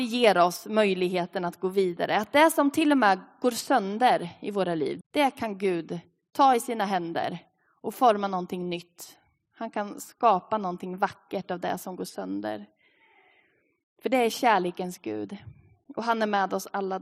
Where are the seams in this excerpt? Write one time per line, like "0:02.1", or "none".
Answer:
0:05.0

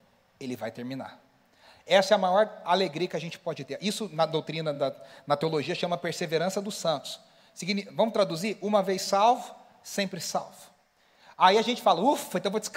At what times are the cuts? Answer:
none

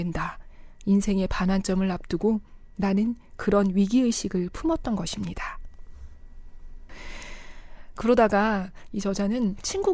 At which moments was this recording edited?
none

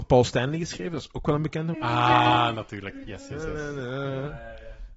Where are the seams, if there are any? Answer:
0:01.7
0:03.0

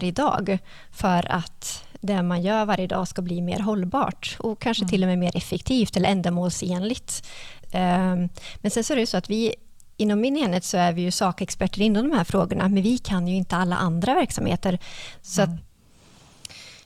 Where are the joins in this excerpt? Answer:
0:07.6
0:15.6

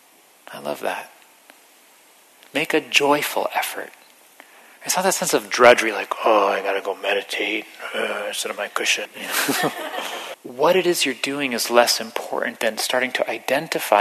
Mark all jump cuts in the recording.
0:09.0
0:10.3
0:12.6

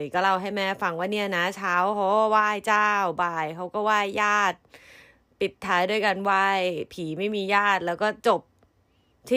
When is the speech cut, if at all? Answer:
none

